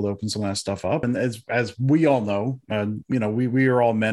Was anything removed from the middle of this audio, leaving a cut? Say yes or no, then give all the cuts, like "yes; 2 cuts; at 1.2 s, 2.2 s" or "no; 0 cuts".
yes; 1 cut; at 1.0 s